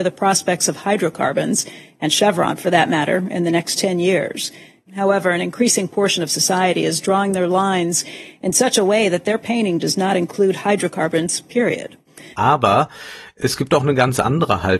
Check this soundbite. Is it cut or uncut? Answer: cut